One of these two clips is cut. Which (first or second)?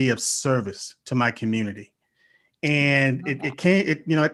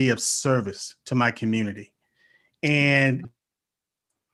second